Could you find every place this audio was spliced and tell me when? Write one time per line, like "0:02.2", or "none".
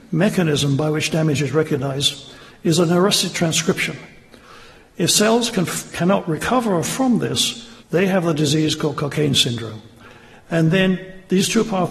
0:07.8

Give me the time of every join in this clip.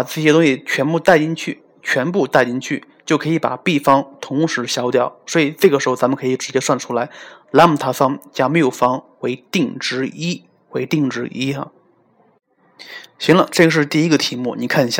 none

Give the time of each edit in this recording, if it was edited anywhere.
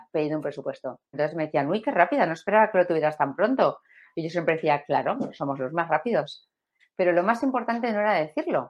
0:01.1
0:06.8

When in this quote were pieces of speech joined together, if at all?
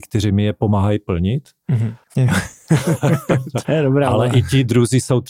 0:02.0
0:03.6

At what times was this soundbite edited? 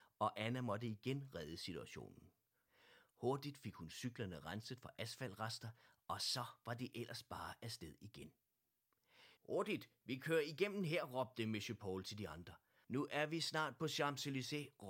0:09.4
0:12.8

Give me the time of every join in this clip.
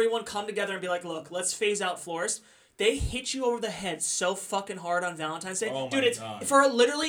none

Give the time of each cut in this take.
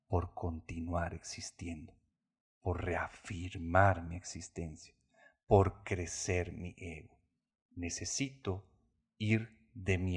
none

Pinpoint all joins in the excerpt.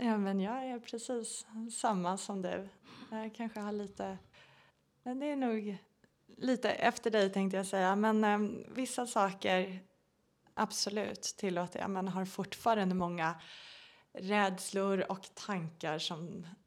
none

